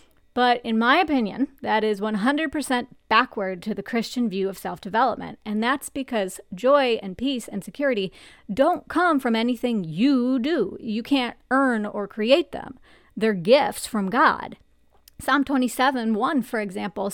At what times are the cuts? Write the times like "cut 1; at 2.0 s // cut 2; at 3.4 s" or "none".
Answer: none